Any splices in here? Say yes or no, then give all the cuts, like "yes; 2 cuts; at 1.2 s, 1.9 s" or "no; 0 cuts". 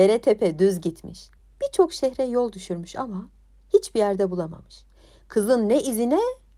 no; 0 cuts